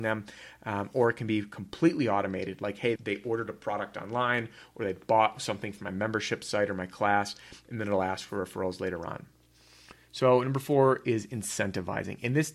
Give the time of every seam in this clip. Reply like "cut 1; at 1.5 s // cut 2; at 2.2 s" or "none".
cut 1; at 3.0 s